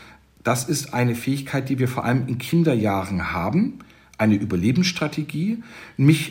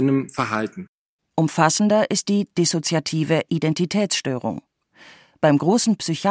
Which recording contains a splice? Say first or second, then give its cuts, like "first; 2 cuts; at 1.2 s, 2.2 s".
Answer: second; 1 cut; at 1.2 s